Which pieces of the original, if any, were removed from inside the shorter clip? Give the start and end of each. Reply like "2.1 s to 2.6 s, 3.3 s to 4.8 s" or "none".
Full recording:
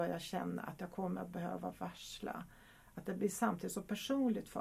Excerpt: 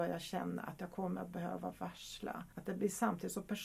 2.5 s to 2.9 s